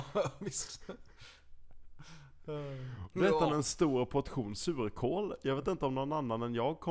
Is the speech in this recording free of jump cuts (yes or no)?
no